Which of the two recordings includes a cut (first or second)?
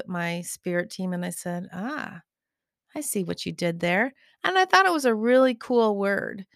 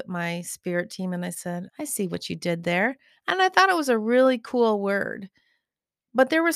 second